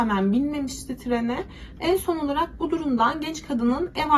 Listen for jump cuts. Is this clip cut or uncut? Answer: cut